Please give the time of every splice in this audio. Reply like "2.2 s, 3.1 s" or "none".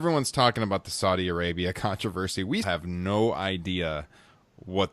2.6 s